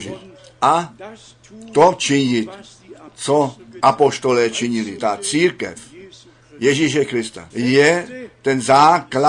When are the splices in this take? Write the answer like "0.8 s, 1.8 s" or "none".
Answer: 5.0 s, 7.5 s